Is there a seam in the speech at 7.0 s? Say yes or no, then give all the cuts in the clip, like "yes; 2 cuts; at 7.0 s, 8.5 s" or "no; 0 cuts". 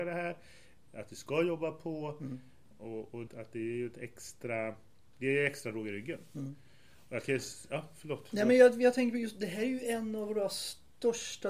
no; 1 cut; at 3.3 s